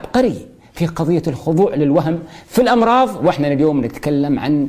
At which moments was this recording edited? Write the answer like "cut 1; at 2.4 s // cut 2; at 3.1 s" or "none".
none